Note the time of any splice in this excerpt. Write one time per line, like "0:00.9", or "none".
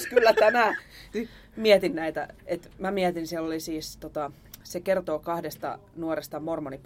0:01.1